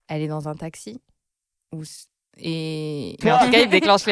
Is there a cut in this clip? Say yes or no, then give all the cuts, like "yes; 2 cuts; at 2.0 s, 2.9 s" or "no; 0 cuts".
yes; 1 cut; at 3.2 s